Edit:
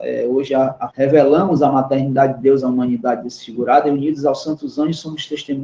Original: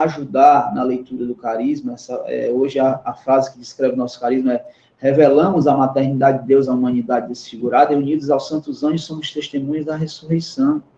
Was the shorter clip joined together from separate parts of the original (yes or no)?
yes